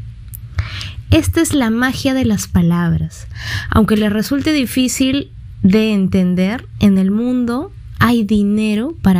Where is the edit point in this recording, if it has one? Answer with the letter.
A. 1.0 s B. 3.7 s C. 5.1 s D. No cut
D